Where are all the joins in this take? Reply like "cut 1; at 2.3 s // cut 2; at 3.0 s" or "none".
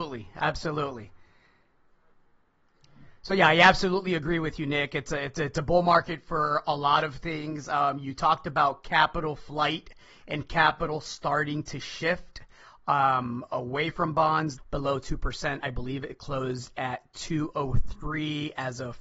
cut 1; at 14.6 s